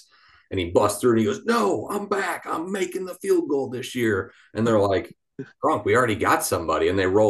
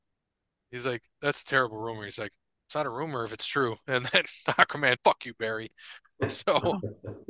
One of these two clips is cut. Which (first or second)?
second